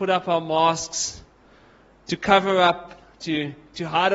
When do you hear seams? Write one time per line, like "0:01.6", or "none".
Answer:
none